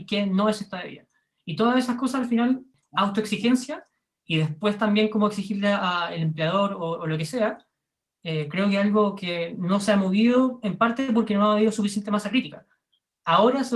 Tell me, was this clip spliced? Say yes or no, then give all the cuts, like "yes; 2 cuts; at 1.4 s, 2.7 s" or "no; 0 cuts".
no; 0 cuts